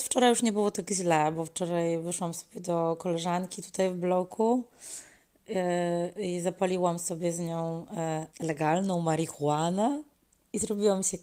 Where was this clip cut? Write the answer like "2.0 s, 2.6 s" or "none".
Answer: 8.3 s